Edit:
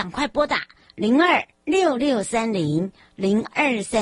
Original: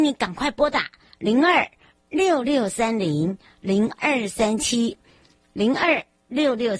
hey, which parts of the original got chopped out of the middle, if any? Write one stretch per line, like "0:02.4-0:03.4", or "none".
0:01.8-0:02.0